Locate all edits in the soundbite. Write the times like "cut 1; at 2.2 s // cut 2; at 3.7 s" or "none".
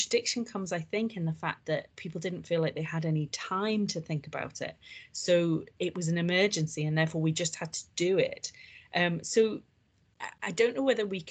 none